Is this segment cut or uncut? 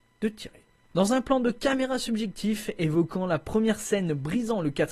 cut